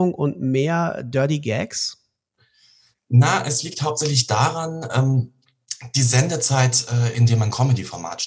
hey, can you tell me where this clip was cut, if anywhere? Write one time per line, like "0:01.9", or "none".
0:07.1